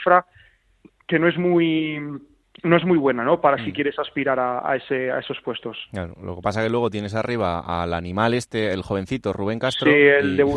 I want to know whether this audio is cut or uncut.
uncut